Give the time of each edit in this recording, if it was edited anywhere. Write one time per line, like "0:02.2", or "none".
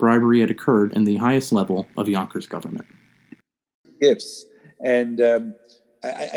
0:03.8

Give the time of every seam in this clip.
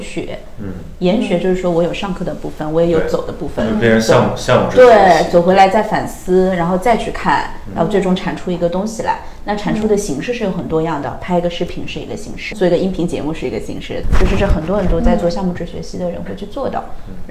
0:12.5
0:14.0

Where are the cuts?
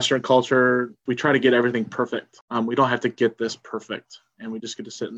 0:01.1
0:02.4

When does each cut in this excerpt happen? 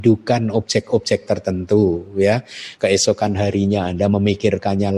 0:02.8

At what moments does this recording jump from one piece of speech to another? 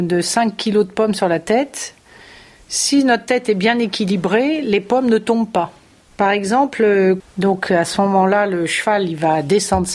0:06.1
0:07.2

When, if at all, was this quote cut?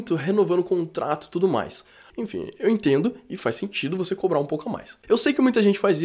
0:02.1
0:05.0

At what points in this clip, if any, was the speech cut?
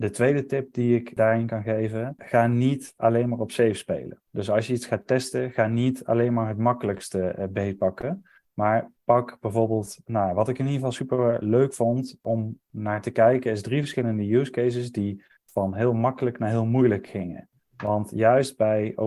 none

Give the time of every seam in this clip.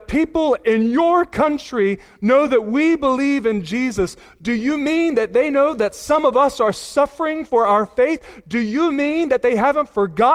none

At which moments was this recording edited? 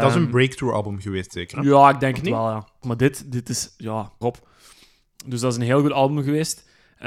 0:02.8
0:04.2

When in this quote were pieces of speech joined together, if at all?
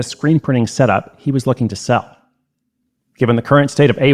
none

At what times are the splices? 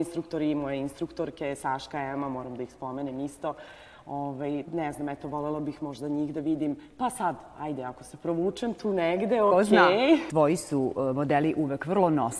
0:04.6

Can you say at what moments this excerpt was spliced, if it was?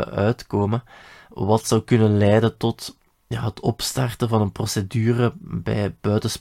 none

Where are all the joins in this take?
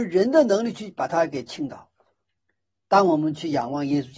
none

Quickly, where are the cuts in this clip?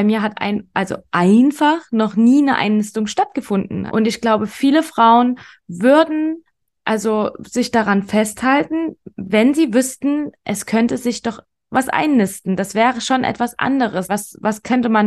0:03.9
0:14.1

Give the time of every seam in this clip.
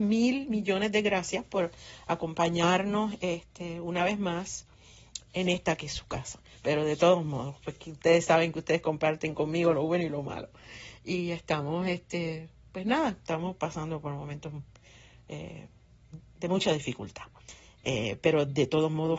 0:05.2
0:06.5

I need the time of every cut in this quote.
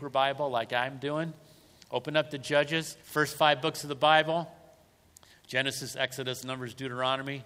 0:03.0
0:06.4

